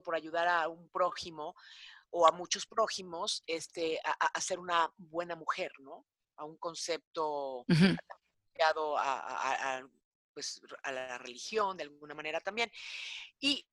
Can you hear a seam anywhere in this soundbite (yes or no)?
no